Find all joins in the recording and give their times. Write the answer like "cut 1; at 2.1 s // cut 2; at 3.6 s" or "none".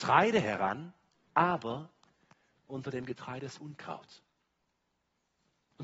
none

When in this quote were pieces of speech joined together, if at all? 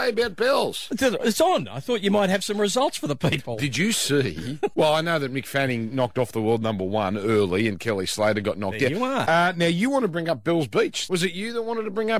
cut 1; at 4.7 s // cut 2; at 9.2 s // cut 3; at 11.1 s

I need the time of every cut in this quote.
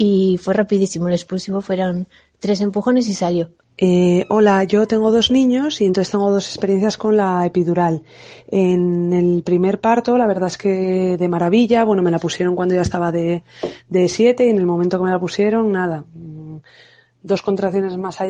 cut 1; at 3.6 s

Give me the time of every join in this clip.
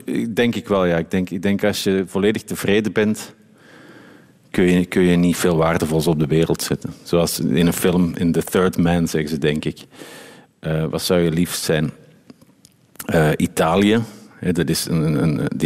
none

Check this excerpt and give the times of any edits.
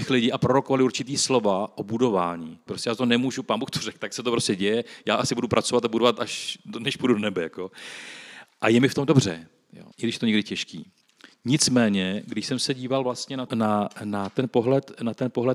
cut 1; at 2.7 s // cut 2; at 9.9 s // cut 3; at 13.5 s

